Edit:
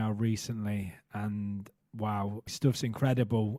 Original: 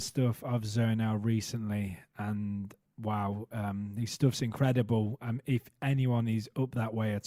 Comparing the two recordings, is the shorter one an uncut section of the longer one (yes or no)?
no